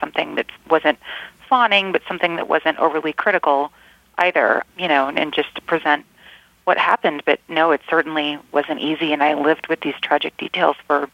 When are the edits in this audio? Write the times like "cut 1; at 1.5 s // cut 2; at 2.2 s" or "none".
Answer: cut 1; at 4.7 s

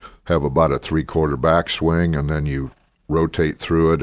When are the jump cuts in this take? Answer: none

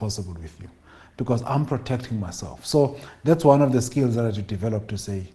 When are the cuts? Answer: none

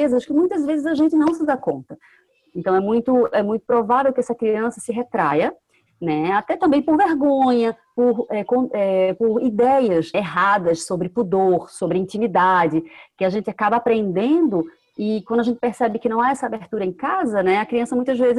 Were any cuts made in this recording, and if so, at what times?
cut 1; at 10.1 s

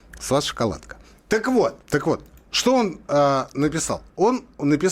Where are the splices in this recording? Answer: cut 1; at 1.8 s

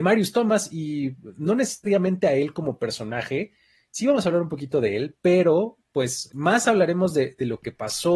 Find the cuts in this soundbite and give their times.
cut 1; at 6.3 s

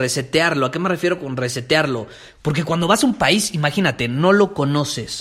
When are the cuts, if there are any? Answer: cut 1; at 2.4 s

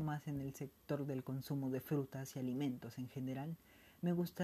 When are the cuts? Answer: none

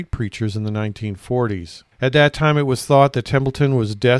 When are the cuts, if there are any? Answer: cut 1; at 1.9 s

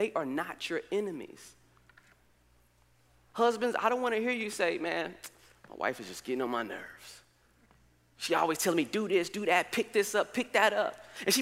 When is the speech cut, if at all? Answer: none

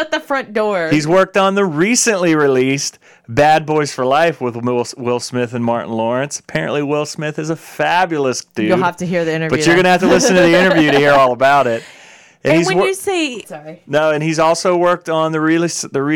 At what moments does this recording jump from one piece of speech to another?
cut 1; at 13.4 s

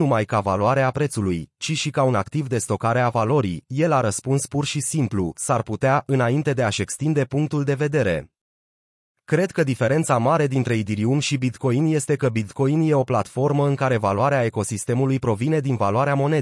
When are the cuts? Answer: none

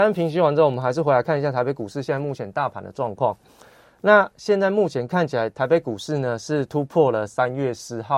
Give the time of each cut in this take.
none

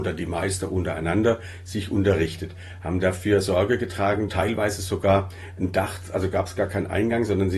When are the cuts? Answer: cut 1; at 4.3 s

